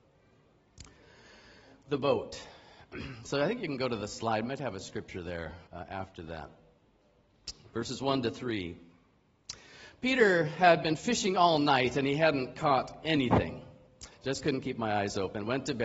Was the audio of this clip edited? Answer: yes; 2 cuts; at 5.7 s, 14.1 s

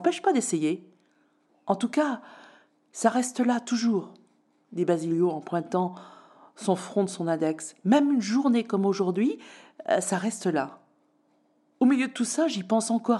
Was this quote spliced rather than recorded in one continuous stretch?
no; 0 cuts

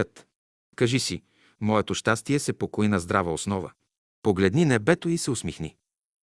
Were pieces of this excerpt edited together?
no; 0 cuts

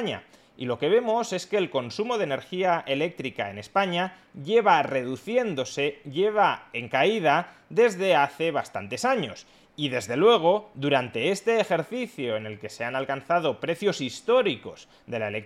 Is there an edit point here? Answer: no; 0 cuts

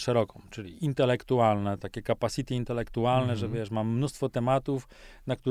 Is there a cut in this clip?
no; 0 cuts

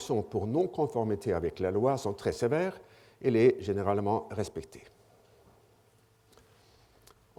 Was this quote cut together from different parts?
no; 0 cuts

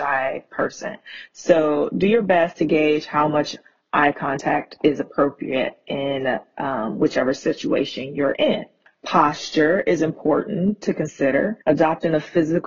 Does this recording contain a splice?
yes; 1 cut; at 11.6 s

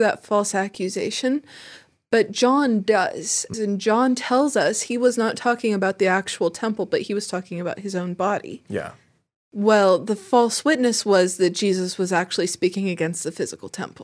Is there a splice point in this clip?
yes; 1 cut; at 3.5 s

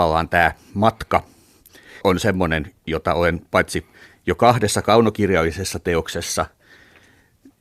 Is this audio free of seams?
no; 1 cut; at 2.0 s

